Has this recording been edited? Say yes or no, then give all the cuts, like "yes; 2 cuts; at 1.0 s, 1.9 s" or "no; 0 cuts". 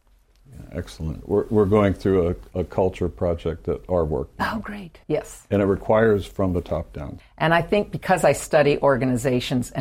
yes; 2 cuts; at 5.0 s, 7.2 s